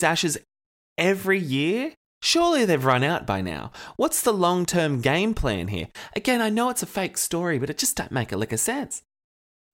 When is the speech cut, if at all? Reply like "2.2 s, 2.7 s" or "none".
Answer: none